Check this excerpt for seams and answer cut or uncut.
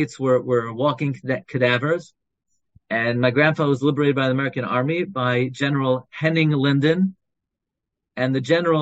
uncut